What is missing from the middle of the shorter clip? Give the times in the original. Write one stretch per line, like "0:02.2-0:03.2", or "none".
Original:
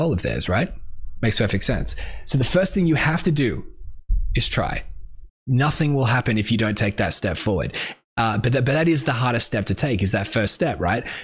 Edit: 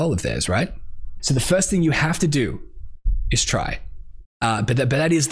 0:01.2-0:02.2
0:05.4-0:08.1